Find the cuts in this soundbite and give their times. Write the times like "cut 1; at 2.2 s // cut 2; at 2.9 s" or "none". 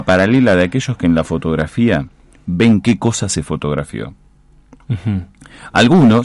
none